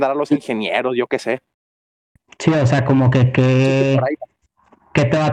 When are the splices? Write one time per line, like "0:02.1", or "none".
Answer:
none